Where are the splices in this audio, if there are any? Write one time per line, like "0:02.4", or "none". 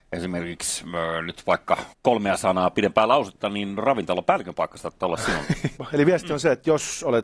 0:01.9
0:05.8